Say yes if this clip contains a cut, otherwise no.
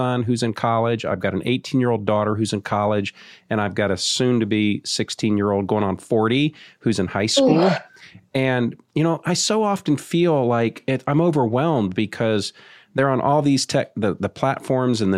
no